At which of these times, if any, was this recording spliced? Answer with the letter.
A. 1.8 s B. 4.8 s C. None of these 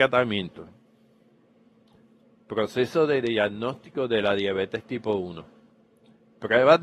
C